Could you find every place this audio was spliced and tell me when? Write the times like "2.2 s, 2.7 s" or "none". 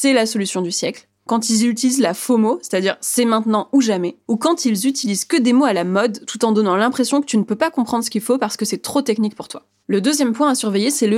none